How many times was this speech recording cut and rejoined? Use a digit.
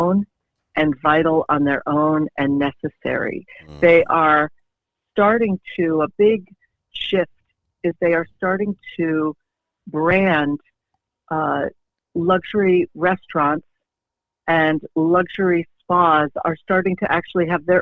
0